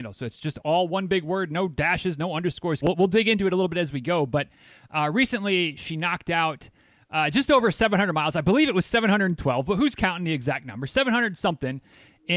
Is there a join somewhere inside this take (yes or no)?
yes